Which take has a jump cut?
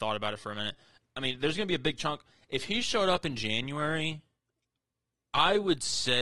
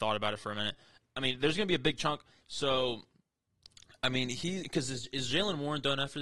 second; 2 cuts; at 2.4 s, 4.6 s

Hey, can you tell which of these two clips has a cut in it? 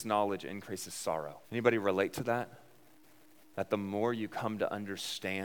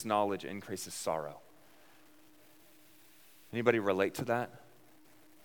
first; 1 cut; at 1.4 s

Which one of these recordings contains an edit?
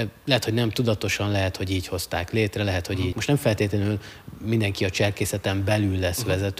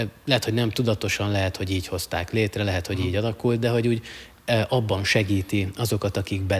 first; 1 cut; at 3.1 s

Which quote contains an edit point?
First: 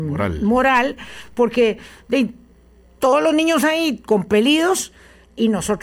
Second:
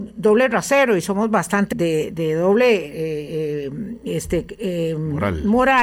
second; 1 cut; at 1.7 s

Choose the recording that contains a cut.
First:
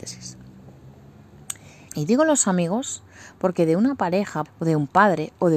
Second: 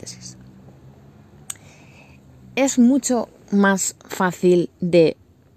first; 2 cuts; at 1.9 s, 4.5 s

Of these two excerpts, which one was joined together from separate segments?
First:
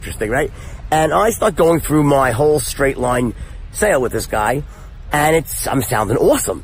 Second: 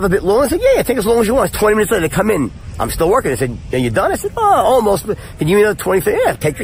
second; 1 cut; at 1.5 s

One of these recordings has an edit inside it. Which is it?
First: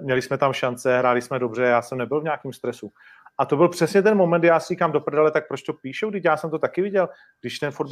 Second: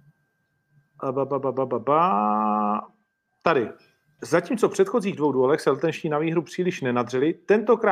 second; 1 cut; at 4.2 s

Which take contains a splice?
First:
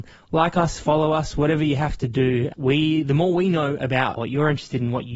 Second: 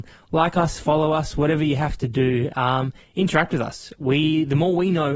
first; 2 cuts; at 2.5 s, 4.2 s

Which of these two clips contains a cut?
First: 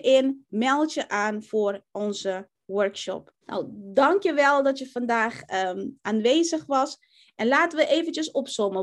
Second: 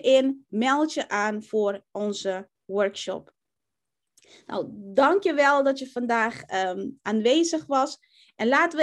first; 1 cut; at 3.4 s

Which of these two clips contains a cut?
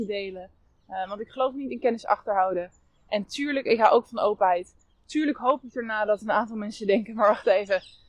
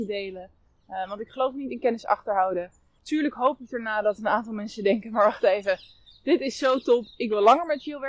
second; 1 cut; at 3.0 s

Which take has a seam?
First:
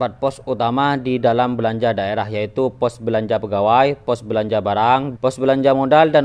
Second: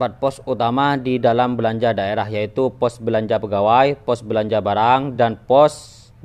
first; 1 cut; at 5.2 s

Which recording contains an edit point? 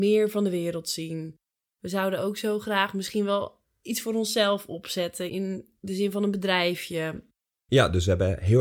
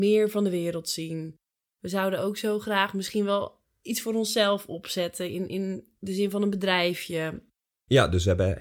first; 1 cut; at 5.3 s

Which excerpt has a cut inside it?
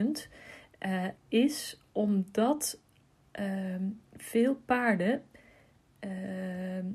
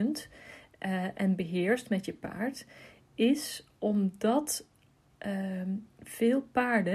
first; 1 cut; at 1.1 s

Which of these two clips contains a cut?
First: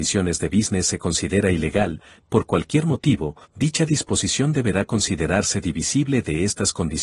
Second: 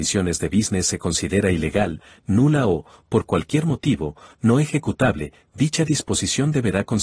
first; 2 cuts; at 2.2 s, 3.4 s

